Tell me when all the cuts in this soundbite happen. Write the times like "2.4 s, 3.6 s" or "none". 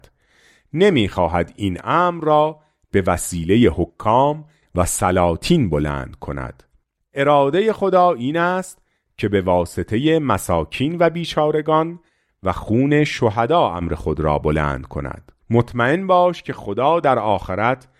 15.4 s